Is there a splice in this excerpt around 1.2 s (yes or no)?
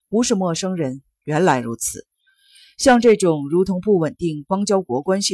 yes